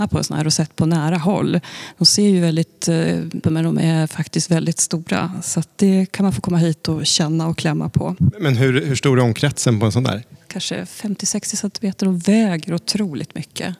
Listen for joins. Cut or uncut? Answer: cut